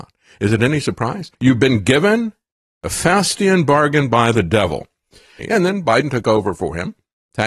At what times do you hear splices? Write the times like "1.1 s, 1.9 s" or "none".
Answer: 1.3 s, 5.4 s